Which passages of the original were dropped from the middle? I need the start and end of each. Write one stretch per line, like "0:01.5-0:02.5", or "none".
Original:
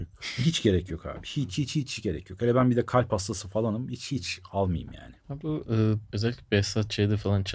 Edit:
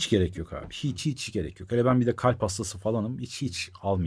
0:01.5-0:01.7